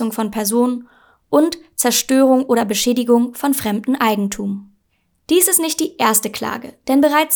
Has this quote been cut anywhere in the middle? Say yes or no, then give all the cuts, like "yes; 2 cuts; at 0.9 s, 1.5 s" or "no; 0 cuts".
no; 0 cuts